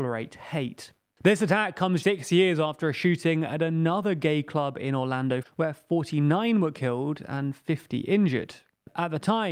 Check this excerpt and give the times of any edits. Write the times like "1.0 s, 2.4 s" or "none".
2.0 s, 5.4 s